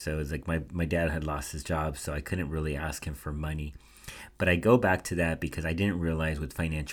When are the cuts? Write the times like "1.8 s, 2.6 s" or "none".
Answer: none